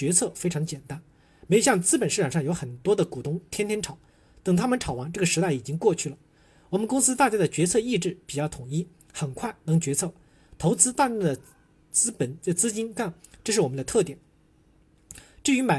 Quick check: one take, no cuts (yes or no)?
yes